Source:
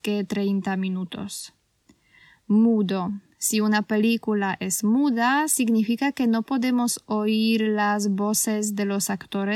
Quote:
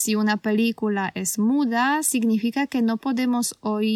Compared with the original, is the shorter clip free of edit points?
yes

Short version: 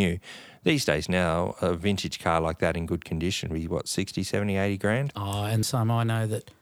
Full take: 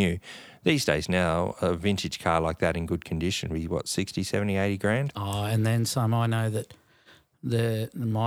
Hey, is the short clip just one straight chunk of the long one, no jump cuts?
no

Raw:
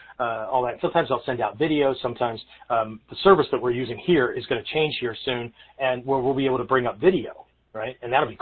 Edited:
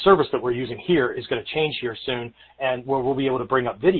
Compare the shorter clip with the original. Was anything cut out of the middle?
no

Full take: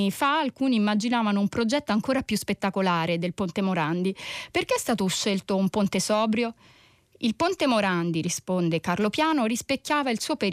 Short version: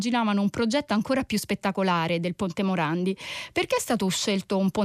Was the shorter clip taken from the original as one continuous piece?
yes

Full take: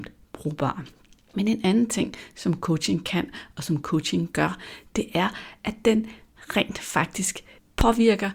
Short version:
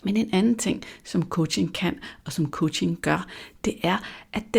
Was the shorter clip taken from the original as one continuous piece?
yes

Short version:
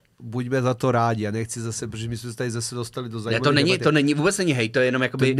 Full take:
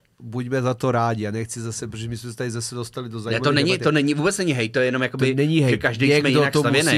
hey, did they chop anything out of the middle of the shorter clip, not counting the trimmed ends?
no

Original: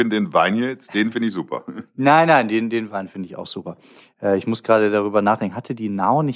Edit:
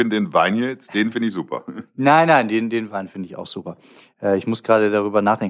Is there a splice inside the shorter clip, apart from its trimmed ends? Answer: no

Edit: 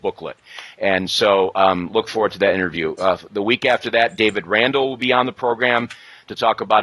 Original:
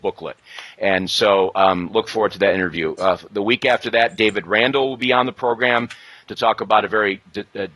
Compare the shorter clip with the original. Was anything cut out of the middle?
no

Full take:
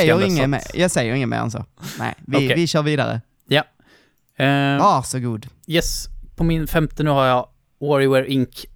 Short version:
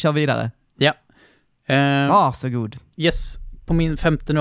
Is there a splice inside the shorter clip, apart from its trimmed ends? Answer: no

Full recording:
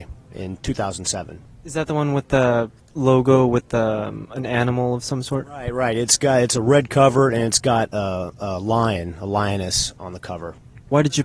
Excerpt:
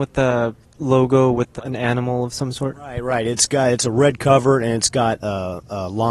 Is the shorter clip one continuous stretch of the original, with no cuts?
no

